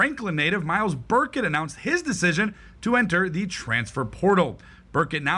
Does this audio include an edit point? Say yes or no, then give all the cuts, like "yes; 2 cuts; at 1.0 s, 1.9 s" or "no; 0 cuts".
no; 0 cuts